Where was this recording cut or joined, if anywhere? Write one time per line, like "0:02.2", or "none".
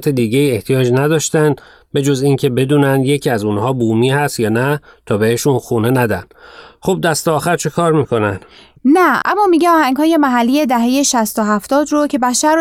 0:08.8